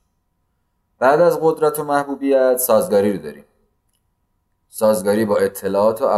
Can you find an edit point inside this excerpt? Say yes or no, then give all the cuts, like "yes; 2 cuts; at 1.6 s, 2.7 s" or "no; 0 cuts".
no; 0 cuts